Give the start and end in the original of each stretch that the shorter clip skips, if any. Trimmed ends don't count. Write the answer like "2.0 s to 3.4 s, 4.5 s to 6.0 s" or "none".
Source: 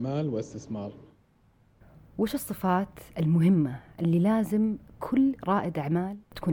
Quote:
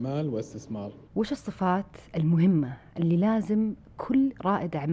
1.0 s to 2.1 s